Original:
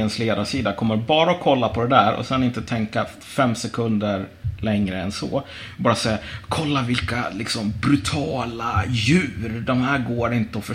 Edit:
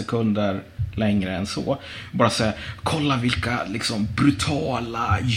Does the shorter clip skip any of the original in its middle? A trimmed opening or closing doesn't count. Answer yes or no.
no